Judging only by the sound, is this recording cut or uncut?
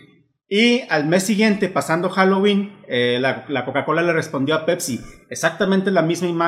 uncut